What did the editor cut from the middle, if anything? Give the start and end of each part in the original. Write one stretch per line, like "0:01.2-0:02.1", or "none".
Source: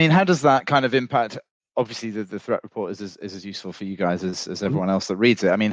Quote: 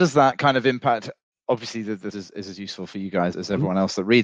0:02.4-0:03.0
0:04.2-0:04.5